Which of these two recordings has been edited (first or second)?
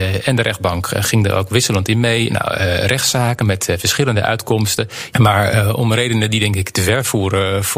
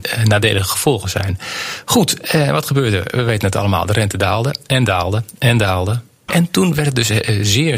first